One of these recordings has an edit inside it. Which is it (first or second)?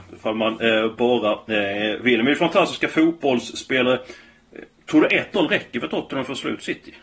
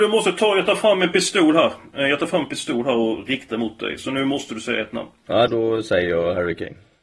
second